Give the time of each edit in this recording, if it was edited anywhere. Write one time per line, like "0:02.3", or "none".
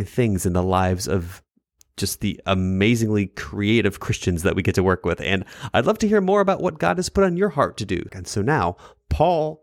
0:08.1